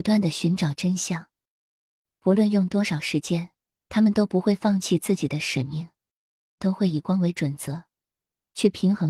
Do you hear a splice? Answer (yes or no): yes